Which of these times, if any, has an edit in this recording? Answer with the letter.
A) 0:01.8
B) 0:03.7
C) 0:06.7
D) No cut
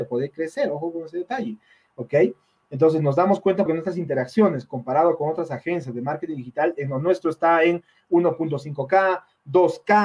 B